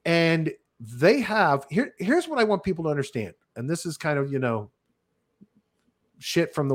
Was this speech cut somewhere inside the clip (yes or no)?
no